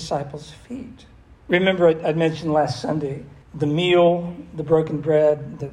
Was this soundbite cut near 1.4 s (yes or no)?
yes